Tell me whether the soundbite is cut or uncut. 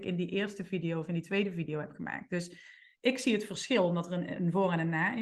uncut